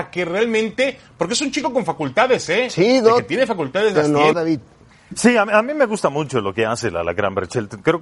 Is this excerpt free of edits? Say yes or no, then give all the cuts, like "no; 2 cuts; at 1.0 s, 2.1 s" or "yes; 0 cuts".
no; 1 cut; at 4.3 s